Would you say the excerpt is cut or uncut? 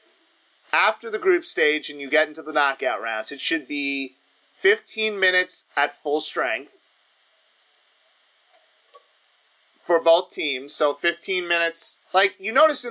cut